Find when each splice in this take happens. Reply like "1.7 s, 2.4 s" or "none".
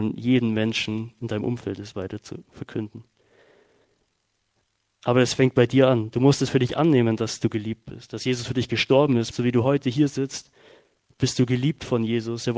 9.3 s